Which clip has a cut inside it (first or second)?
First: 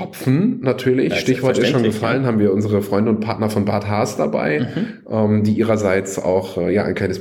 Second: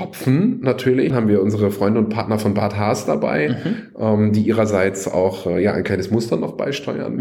second